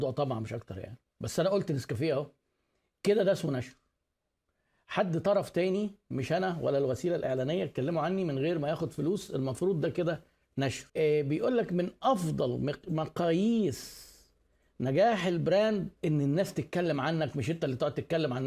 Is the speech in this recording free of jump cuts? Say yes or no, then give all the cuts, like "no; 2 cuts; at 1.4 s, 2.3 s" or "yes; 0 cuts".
no; 2 cuts; at 10.9 s, 16.0 s